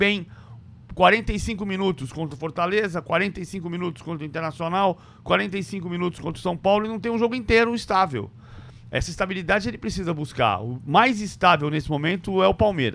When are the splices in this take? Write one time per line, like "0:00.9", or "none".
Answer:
none